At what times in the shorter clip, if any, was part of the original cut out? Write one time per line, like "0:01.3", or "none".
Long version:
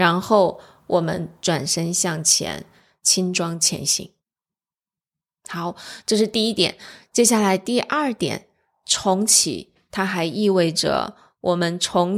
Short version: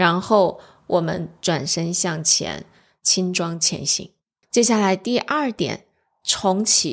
0:04.4